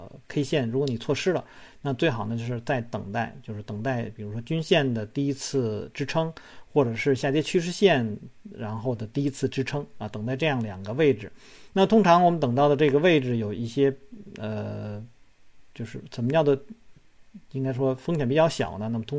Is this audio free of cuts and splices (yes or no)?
yes